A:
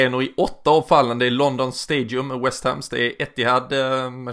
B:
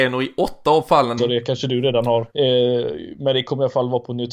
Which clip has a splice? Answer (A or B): B